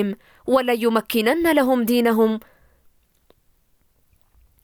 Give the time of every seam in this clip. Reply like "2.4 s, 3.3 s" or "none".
none

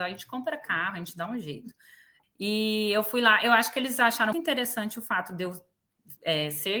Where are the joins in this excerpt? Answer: 2.2 s, 4.3 s

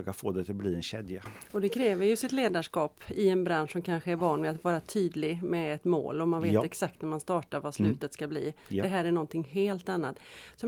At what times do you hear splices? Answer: none

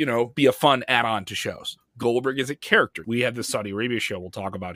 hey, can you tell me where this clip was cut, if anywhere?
1.8 s, 3.0 s

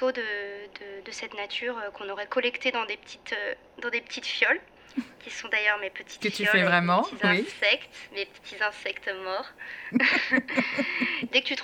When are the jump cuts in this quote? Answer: none

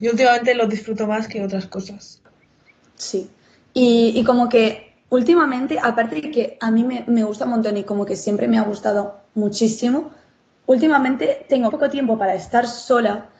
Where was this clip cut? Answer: 11.7 s

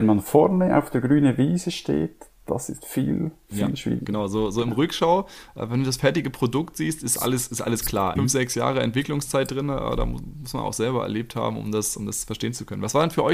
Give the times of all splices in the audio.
8.2 s

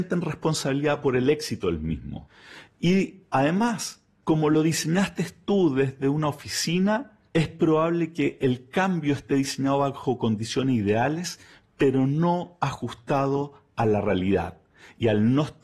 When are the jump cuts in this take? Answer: none

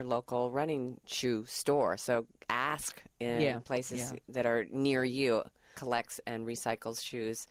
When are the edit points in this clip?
5.8 s

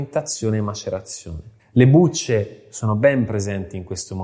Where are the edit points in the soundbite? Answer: 1.6 s

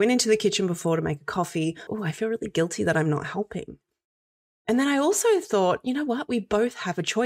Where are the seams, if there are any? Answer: 1.9 s

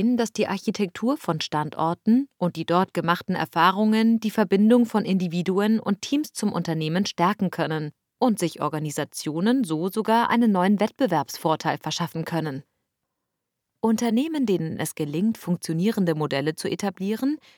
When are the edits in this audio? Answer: none

